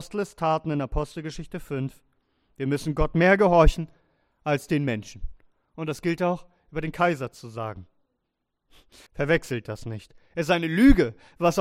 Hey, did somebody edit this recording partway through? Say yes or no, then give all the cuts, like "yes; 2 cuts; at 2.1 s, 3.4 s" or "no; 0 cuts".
yes; 1 cut; at 9.1 s